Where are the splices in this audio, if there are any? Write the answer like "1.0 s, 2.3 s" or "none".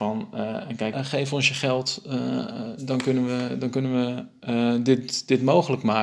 0.9 s